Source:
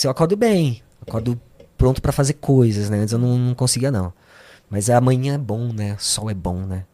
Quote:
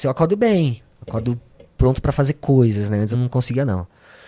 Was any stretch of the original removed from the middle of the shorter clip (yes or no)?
yes